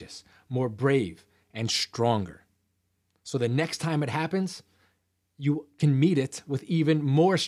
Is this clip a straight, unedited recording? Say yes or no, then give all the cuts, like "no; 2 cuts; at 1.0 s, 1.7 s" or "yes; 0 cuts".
yes; 0 cuts